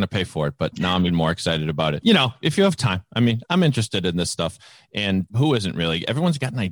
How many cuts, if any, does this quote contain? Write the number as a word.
one